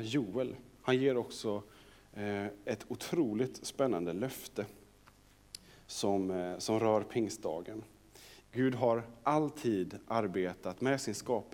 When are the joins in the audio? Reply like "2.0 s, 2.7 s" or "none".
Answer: 8.4 s